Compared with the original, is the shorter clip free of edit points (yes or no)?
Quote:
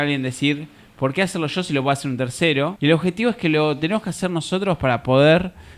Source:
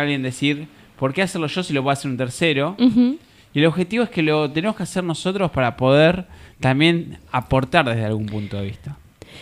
no